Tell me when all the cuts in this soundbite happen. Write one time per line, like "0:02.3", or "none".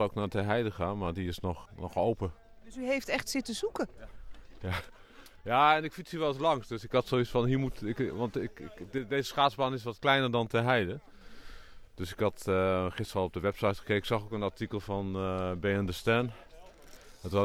0:01.7